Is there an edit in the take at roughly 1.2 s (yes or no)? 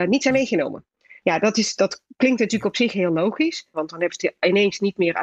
yes